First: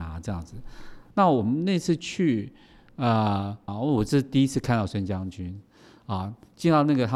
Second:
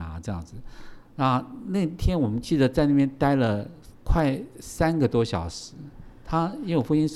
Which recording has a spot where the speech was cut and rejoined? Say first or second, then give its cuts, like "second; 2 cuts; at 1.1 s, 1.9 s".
first; 2 cuts; at 1.1 s, 3.7 s